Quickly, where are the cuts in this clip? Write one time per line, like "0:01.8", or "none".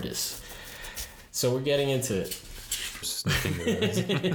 0:03.0